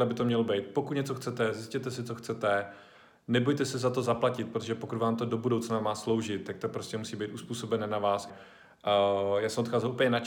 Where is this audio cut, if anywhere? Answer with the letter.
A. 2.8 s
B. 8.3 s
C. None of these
B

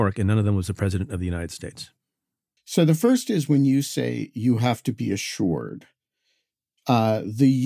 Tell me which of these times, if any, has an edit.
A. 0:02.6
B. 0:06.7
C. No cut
A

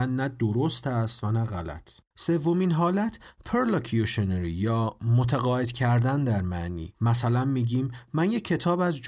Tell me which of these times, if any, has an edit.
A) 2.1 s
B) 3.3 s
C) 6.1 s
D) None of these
A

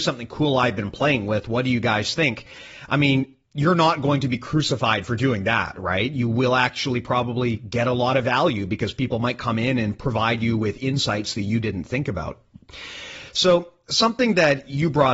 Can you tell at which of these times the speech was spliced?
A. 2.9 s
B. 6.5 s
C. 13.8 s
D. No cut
D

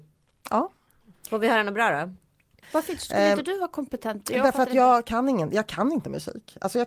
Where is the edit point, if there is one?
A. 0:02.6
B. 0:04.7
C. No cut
A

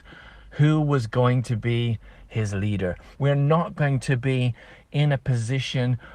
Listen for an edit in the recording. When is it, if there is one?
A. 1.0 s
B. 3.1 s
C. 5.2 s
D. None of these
B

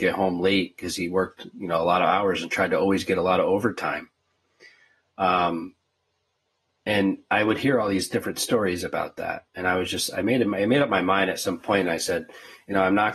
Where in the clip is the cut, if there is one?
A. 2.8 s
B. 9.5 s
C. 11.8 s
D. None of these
D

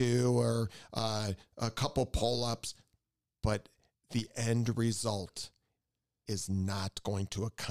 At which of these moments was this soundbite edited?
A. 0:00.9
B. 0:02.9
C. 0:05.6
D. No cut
D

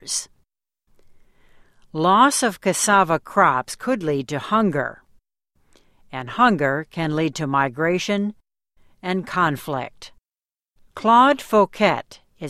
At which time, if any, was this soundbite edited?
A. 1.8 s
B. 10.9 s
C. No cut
B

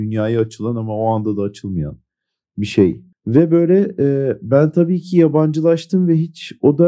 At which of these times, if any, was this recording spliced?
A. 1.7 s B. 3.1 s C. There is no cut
B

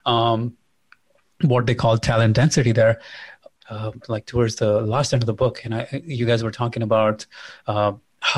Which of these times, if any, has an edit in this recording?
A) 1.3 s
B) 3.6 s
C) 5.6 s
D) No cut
B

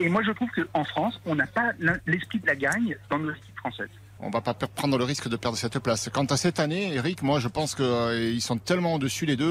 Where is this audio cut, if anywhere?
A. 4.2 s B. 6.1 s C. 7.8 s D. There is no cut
A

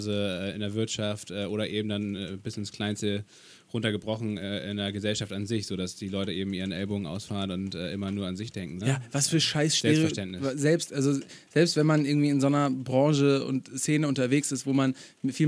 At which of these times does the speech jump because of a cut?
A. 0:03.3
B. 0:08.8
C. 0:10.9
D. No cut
B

